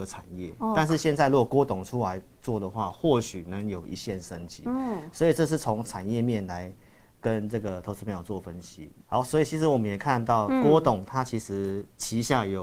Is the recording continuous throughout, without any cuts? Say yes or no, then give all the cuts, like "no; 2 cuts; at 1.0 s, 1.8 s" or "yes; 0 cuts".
yes; 0 cuts